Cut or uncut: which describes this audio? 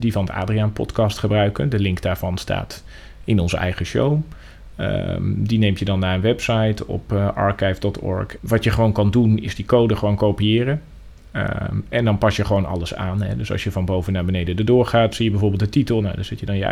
cut